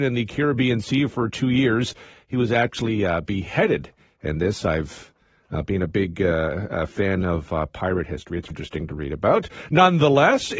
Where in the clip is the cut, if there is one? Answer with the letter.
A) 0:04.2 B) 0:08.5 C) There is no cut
B